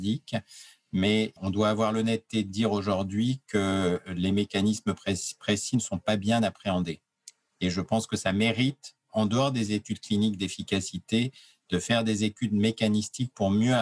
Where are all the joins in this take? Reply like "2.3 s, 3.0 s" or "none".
1.4 s